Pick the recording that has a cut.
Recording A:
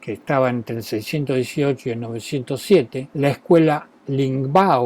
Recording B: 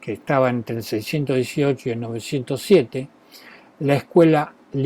A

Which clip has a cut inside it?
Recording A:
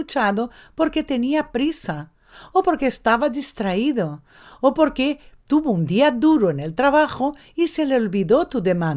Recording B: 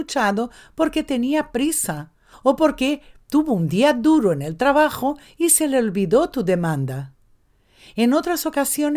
B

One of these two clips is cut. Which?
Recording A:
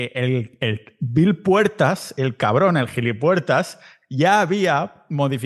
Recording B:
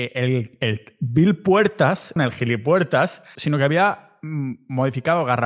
B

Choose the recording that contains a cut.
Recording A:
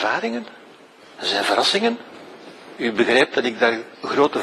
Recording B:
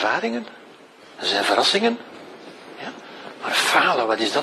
A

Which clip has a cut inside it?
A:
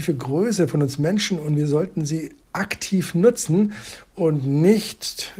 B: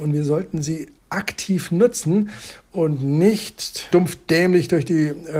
B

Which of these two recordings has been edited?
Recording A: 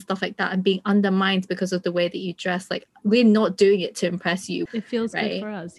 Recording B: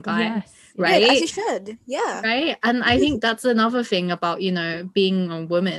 A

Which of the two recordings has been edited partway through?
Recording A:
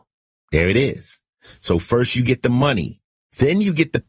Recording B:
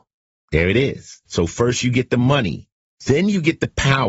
B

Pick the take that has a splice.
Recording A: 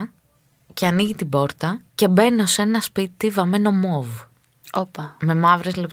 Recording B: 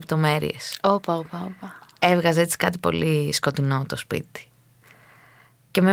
A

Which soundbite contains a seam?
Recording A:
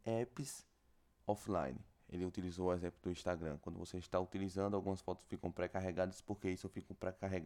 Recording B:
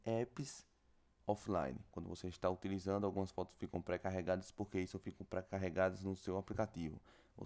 B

